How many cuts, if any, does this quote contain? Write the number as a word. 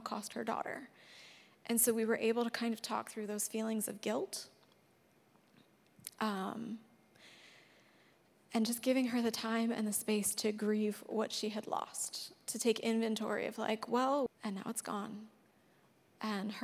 one